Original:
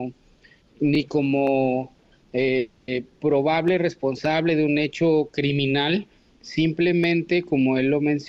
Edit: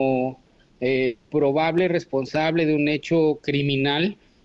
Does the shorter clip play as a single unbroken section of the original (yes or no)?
no